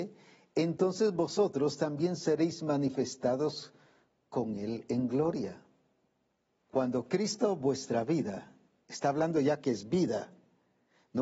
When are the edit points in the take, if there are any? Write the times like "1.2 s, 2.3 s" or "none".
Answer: 6.6 s